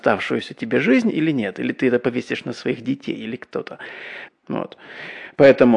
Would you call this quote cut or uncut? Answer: cut